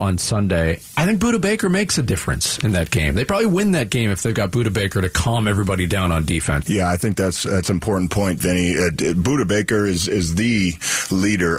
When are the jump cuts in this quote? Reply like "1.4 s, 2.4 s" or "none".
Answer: 6.6 s